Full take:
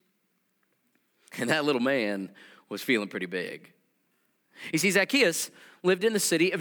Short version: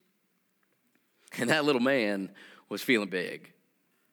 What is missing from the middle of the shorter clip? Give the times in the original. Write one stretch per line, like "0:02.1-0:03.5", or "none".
0:03.1-0:03.3